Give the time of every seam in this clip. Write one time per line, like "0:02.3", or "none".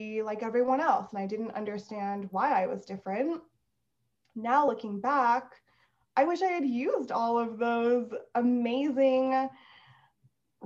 none